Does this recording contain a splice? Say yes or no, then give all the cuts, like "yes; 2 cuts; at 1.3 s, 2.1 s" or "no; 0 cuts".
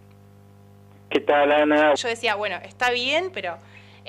yes; 1 cut; at 1.9 s